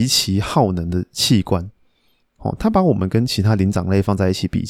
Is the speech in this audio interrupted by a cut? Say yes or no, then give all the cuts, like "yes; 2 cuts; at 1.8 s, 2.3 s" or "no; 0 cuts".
yes; 1 cut; at 2.2 s